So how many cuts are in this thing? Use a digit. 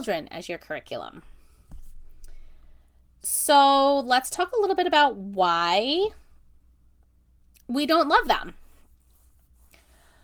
0